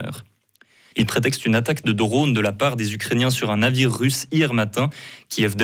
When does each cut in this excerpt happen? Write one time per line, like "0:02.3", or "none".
0:00.9